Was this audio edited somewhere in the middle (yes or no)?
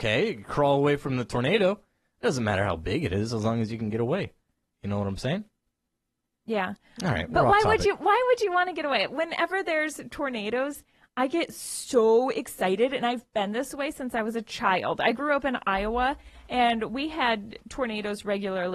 no